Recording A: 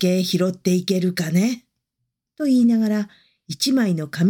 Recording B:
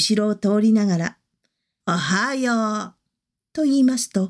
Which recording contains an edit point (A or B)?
B